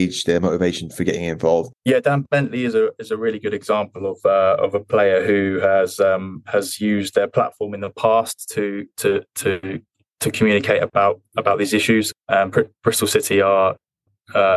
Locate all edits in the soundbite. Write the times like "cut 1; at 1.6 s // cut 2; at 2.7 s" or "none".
cut 1; at 1.7 s // cut 2; at 12.1 s